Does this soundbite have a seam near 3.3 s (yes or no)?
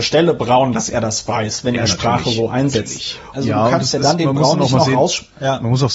yes